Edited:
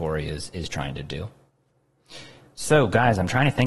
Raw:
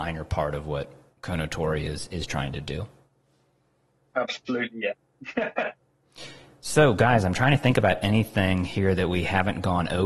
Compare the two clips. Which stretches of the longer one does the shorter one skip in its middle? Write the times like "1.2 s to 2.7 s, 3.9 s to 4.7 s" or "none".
3.3 s to 5.8 s